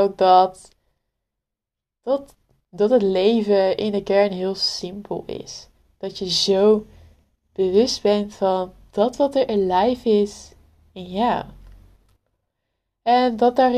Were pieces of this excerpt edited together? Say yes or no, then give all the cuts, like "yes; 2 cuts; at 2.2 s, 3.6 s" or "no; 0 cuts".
yes; 1 cut; at 2.6 s